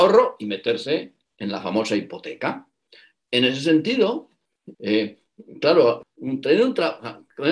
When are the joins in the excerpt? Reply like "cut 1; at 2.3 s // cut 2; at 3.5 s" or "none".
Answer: cut 1; at 4.7 s // cut 2; at 6.0 s